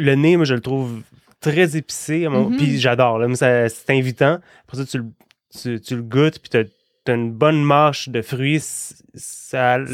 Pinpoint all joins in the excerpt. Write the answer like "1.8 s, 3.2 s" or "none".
7.0 s, 8.6 s